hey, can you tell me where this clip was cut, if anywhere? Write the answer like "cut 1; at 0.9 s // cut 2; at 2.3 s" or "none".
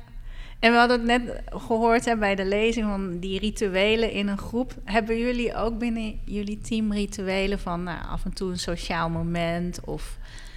none

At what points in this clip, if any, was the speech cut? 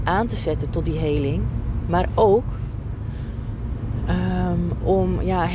none

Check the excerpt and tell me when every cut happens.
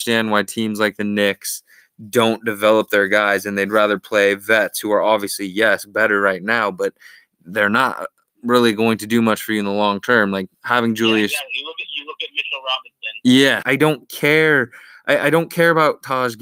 cut 1; at 13.6 s

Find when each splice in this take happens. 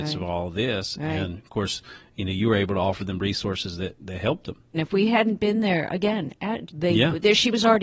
cut 1; at 4.7 s // cut 2; at 6.7 s

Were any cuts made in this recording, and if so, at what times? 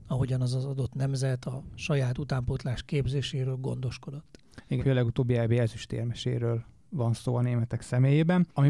cut 1; at 4.8 s

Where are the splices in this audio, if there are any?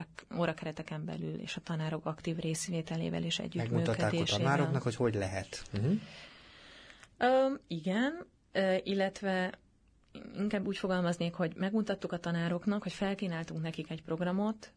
none

